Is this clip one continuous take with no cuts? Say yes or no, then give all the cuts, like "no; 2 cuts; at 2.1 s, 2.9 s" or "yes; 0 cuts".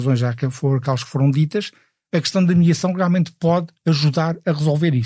yes; 0 cuts